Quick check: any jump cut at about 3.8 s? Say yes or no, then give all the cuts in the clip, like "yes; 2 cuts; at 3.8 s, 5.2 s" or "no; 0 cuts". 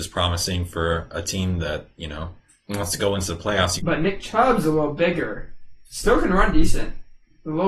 yes; 1 cut; at 3.8 s